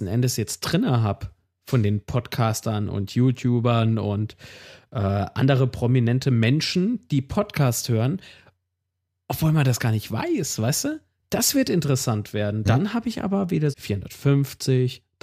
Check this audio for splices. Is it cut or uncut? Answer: cut